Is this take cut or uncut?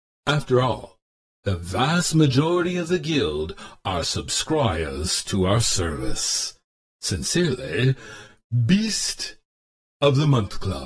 cut